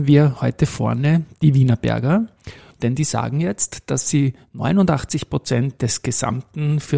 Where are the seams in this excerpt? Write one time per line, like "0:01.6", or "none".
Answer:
0:02.7